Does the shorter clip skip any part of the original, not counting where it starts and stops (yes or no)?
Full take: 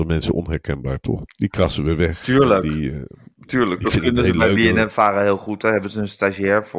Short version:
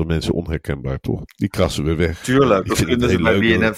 yes